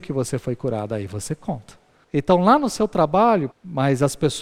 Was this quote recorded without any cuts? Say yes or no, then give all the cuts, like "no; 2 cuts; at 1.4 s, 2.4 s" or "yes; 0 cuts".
no; 2 cuts; at 2.0 s, 3.5 s